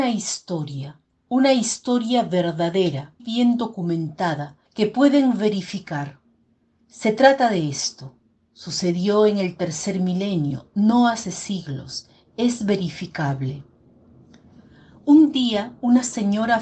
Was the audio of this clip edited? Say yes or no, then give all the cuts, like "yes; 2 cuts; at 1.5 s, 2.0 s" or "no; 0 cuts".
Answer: yes; 2 cuts; at 3.2 s, 4.6 s